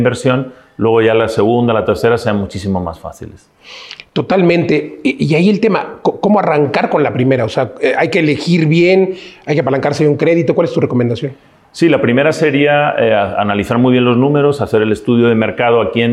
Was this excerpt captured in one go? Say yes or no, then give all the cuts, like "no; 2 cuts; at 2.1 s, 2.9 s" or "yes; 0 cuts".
yes; 0 cuts